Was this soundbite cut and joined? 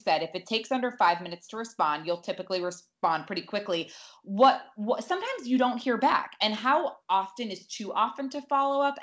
no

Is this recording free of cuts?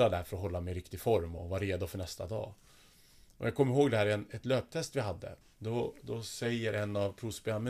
no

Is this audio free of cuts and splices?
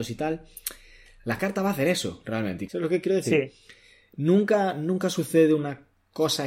no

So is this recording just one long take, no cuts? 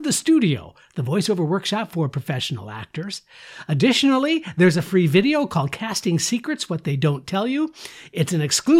yes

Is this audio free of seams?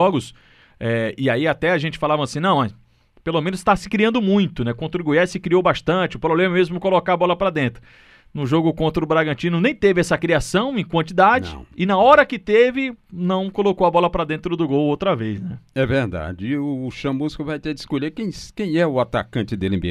yes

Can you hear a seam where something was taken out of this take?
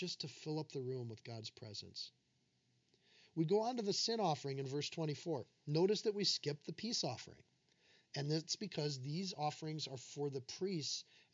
no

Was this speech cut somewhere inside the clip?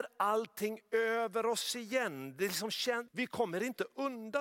yes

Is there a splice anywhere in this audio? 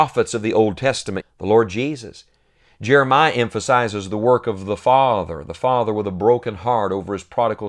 yes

